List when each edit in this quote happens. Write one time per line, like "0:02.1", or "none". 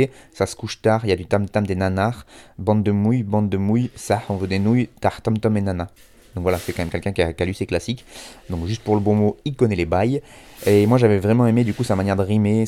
none